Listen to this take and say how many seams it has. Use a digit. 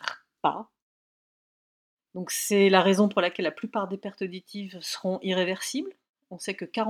0